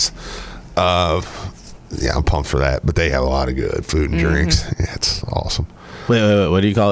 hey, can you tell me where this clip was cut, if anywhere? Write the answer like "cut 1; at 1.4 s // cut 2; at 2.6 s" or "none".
none